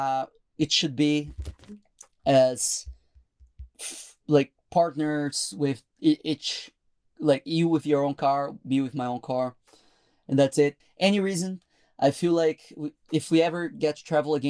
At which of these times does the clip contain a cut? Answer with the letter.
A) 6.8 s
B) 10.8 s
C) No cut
B